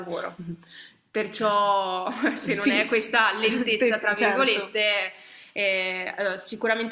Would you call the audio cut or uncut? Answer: uncut